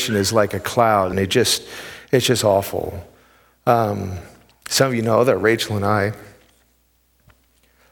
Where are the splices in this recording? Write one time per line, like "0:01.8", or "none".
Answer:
0:01.1

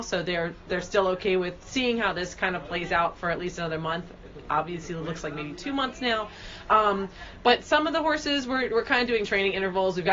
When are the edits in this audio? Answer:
none

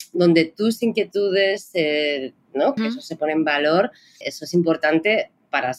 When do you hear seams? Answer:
0:02.8
0:04.2

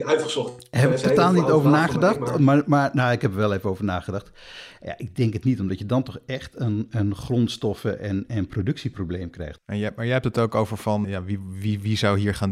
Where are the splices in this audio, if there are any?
0:09.6
0:11.0

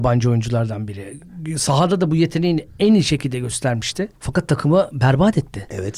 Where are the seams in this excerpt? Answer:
0:04.2

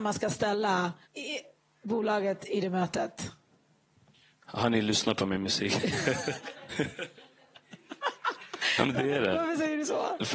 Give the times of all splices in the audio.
0:01.0
0:06.7

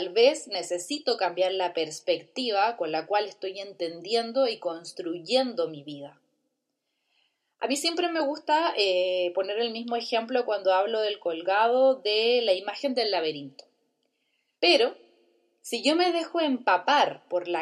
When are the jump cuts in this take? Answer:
0:14.6

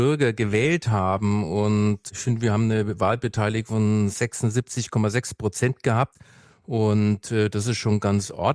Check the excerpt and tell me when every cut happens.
none

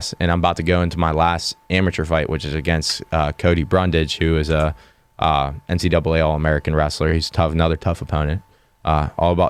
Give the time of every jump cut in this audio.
none

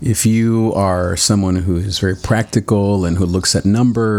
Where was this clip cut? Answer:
none

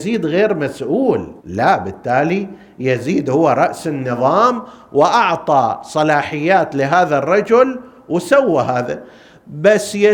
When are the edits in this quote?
0:01.4

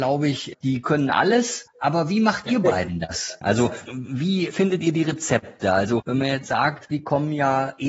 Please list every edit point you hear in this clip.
0:03.4
0:06.9

